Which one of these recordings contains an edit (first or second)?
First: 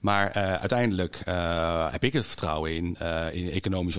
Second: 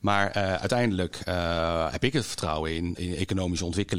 second